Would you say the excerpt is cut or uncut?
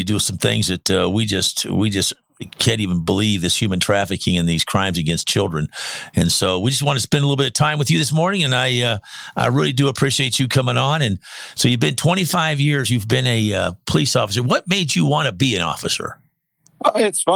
uncut